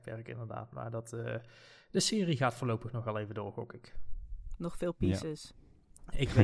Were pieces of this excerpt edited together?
no; 0 cuts

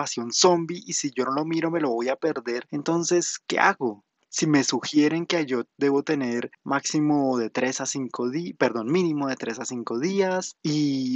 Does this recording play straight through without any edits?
yes; 0 cuts

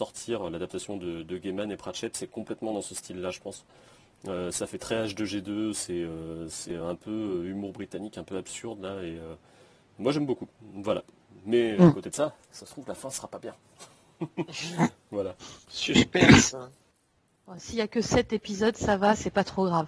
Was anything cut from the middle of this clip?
yes; 1 cut; at 15.6 s

